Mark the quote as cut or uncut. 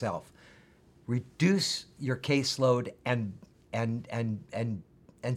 uncut